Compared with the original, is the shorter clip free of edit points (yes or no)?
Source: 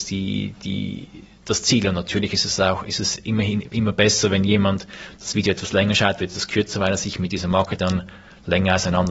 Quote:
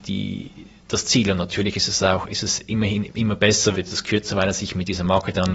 no